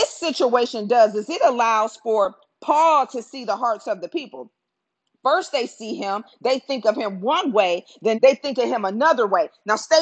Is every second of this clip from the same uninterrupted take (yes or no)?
no